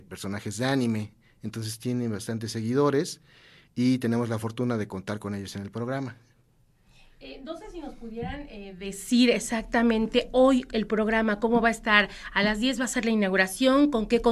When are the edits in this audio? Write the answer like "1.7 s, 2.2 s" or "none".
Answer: none